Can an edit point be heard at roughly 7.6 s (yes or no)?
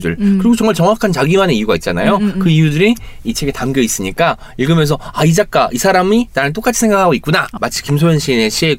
yes